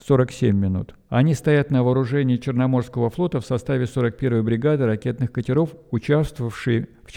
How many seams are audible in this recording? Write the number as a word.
one